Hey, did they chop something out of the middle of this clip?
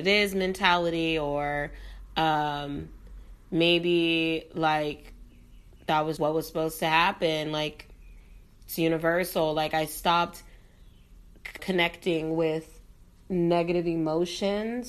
yes; 2 cuts; at 6.2 s, 11.6 s

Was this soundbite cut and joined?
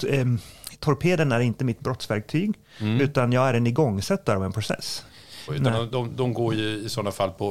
yes; 1 cut; at 5.5 s

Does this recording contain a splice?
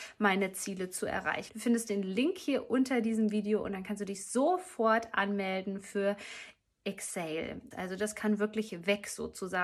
yes; 2 cuts; at 1.5 s, 7.7 s

